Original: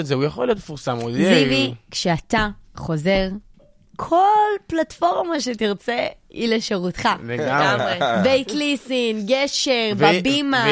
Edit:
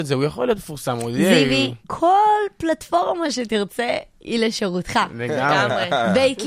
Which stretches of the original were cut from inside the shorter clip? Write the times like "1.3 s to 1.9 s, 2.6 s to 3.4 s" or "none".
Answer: 1.8 s to 3.9 s